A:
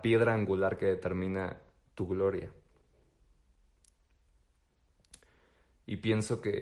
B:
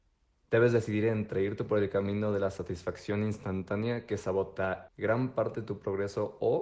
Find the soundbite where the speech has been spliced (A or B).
B